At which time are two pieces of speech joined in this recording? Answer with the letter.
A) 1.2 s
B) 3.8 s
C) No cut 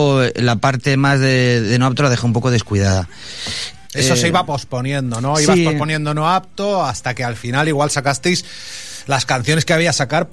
B